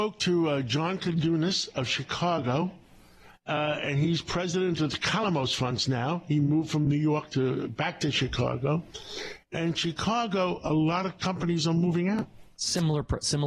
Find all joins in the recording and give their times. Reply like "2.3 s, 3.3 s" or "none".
none